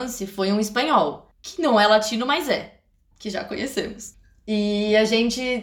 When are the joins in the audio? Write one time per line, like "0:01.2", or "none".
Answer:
0:03.1